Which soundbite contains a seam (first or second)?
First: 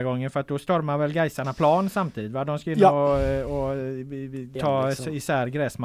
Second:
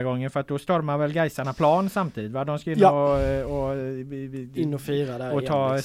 first